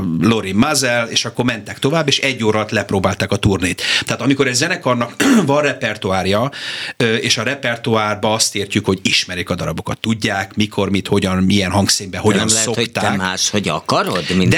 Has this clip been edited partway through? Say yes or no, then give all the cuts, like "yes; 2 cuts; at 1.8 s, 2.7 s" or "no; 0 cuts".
no; 0 cuts